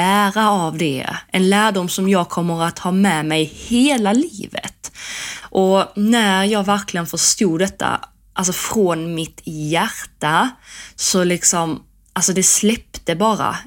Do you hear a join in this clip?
yes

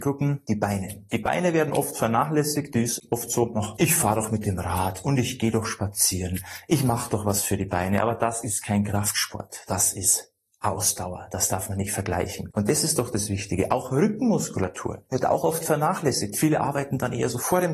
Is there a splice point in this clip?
yes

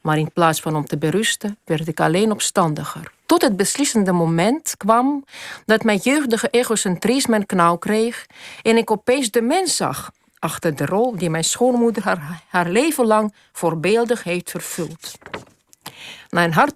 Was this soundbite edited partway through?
yes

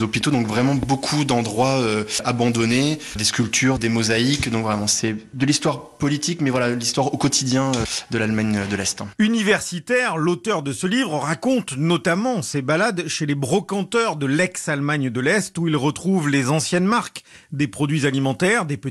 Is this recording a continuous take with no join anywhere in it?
yes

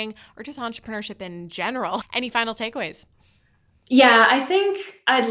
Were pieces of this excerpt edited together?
yes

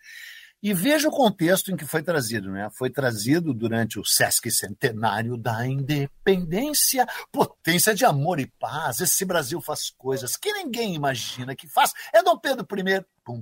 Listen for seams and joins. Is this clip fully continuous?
yes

